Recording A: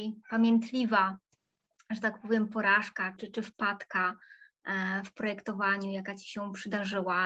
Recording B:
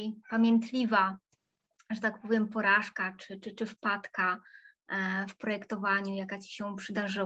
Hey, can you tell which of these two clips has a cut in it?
A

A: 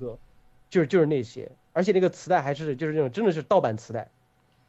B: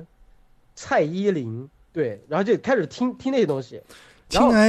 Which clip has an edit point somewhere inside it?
B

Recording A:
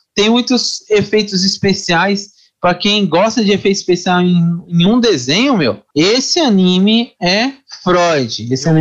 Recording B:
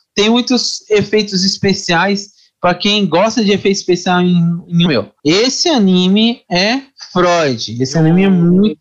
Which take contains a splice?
B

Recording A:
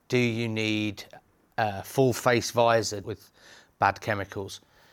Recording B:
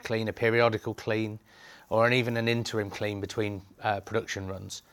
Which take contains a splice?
A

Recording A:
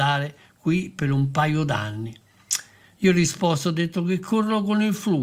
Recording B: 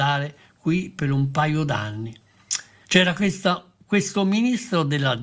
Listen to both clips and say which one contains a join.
B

